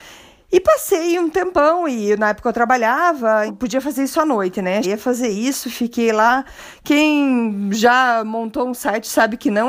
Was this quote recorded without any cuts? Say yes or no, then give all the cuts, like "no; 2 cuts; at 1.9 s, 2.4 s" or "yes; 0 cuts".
no; 2 cuts; at 3.5 s, 4.8 s